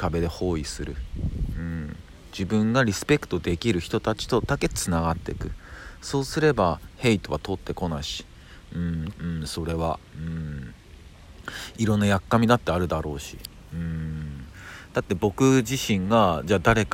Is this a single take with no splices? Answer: no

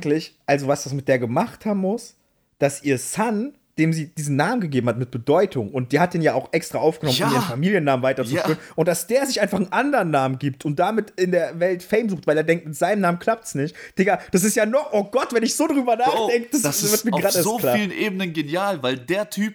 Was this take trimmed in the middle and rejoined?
no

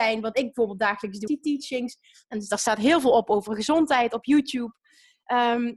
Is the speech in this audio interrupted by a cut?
yes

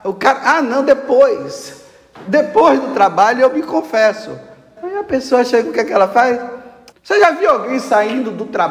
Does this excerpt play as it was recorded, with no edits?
no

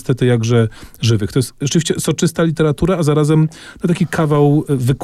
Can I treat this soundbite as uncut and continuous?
yes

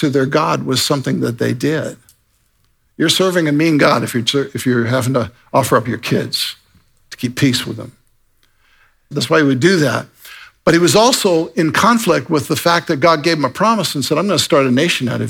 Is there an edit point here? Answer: yes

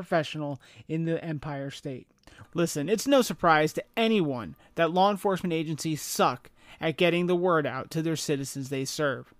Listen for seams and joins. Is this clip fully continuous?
no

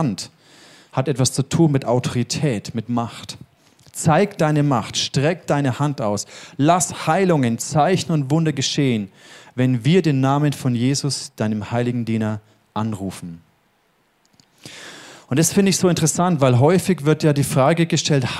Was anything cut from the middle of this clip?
no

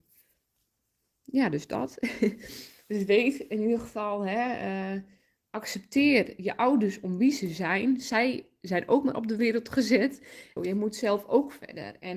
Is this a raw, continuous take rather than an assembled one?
no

